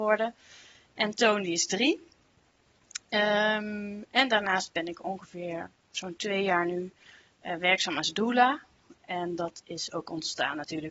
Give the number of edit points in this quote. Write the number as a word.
zero